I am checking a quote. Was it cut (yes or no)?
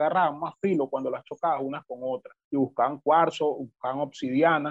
yes